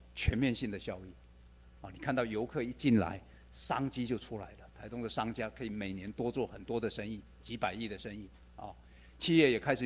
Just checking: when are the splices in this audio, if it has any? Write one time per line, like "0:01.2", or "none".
none